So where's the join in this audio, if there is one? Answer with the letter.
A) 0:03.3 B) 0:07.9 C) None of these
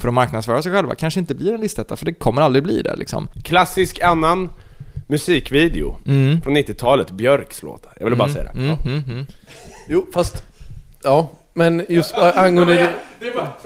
A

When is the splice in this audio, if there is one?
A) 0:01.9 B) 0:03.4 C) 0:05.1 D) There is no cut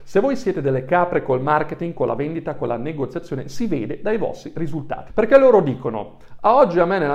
C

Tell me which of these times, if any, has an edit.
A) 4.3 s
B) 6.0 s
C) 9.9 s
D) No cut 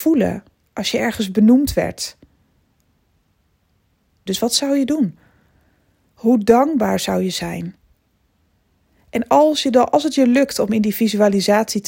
A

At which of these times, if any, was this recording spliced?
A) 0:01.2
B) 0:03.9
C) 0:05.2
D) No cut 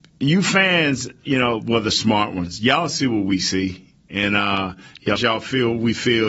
C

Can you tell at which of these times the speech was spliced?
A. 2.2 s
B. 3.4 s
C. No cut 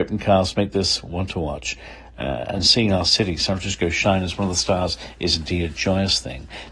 C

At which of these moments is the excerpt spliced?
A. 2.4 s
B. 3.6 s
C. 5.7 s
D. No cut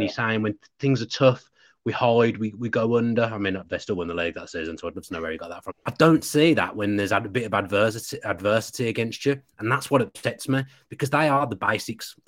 C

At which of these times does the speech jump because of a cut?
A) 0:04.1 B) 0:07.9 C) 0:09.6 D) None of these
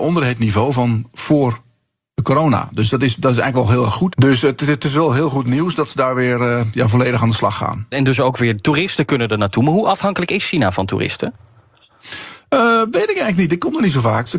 A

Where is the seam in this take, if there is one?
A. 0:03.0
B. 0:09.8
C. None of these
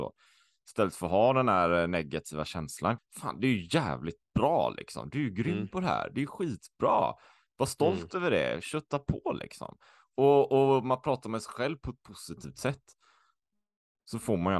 A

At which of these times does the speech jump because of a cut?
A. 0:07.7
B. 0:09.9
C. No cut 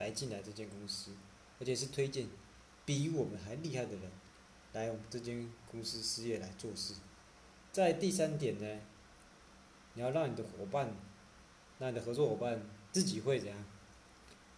A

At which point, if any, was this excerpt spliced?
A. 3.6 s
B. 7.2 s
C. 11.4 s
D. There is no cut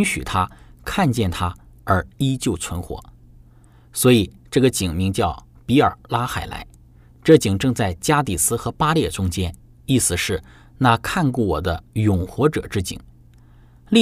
D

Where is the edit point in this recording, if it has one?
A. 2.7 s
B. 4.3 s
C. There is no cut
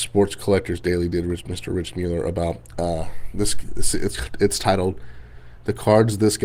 C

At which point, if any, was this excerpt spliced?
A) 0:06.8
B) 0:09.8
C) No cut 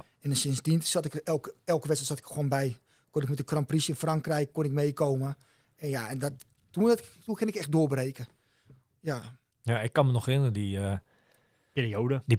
C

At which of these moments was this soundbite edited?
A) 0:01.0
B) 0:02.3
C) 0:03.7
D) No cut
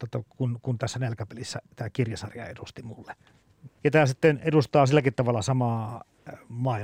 C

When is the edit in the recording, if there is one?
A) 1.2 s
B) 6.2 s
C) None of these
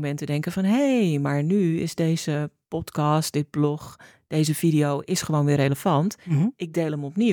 C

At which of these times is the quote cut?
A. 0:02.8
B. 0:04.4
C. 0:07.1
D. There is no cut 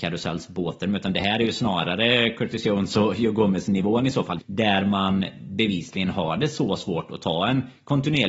B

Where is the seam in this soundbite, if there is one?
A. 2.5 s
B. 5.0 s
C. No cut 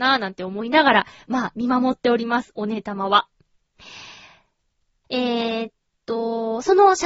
B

